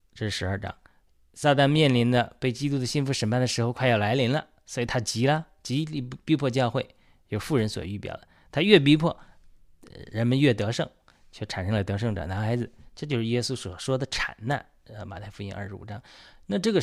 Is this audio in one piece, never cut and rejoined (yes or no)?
yes